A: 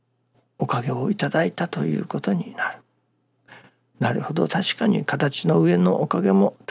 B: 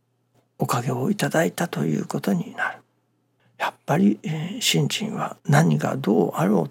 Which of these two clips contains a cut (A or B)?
B